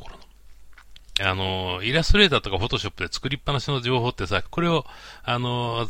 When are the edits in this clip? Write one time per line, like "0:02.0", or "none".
0:01.2
0:04.4